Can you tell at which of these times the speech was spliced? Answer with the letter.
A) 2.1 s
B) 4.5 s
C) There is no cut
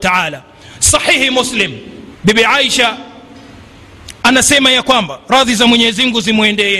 A